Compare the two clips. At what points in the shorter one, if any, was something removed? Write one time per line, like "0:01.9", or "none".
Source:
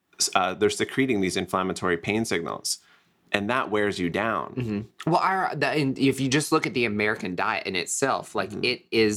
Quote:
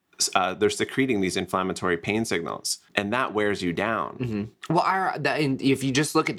0:02.9